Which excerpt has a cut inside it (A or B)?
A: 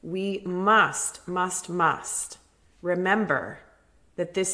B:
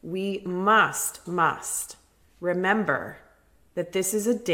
B